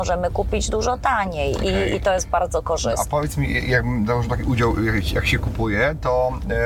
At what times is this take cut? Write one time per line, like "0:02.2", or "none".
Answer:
none